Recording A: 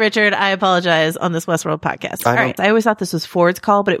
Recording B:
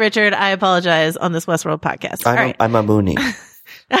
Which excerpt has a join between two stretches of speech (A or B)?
A